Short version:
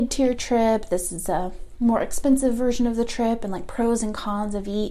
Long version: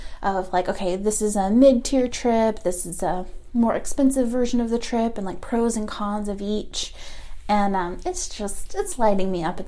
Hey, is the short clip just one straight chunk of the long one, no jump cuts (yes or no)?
yes